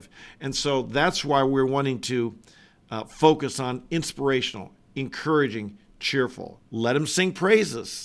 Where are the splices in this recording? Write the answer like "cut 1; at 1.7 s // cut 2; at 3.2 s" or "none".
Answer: cut 1; at 4.9 s // cut 2; at 6.6 s